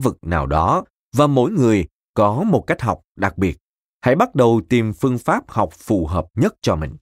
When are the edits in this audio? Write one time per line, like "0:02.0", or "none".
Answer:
0:03.8

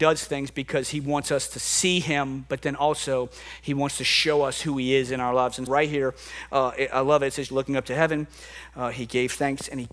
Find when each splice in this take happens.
0:05.7
0:07.5

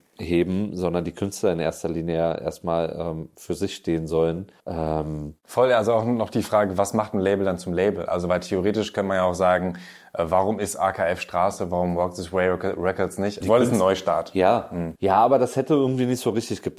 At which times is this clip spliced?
0:04.6
0:13.4
0:15.0

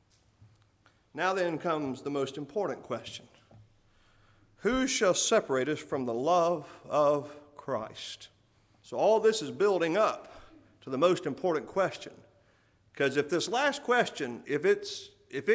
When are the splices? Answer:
0:08.8
0:14.4

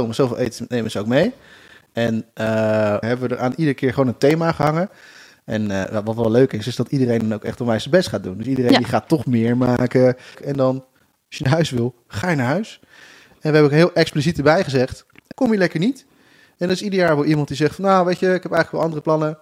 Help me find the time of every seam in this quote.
0:03.0
0:10.3
0:15.3

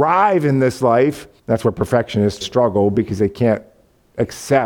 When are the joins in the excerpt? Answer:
0:01.4
0:02.4

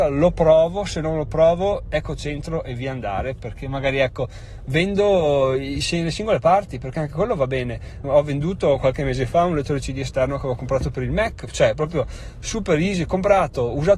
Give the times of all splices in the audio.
0:08.0

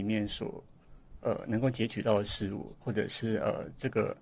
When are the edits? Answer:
0:02.8

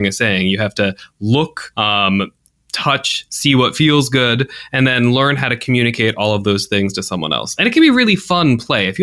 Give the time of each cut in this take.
0:01.7

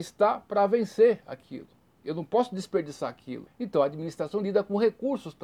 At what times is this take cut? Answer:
0:03.5

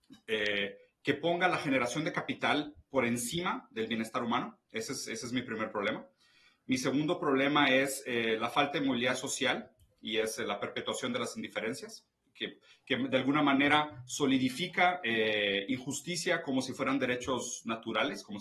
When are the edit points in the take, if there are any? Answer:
0:04.6

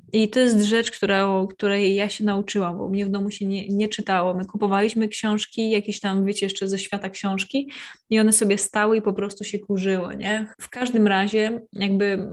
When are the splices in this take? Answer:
0:10.5

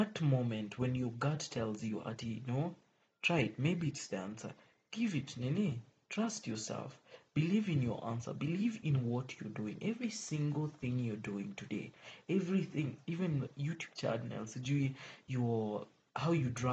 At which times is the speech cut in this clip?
none

